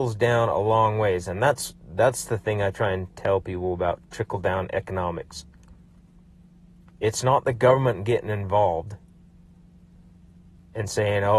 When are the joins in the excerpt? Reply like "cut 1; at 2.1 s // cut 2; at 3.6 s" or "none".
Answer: none